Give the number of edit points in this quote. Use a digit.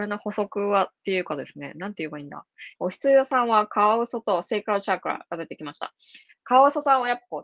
1